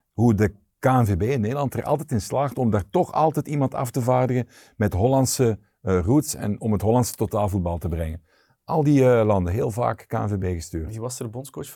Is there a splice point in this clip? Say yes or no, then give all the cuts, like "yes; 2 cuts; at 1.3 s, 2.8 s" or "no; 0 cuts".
no; 0 cuts